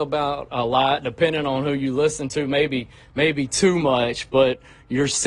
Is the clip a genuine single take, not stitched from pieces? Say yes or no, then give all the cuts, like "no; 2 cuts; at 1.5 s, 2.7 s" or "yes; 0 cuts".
yes; 0 cuts